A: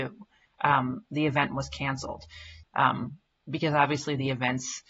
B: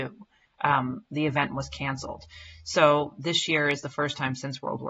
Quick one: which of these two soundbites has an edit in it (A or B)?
A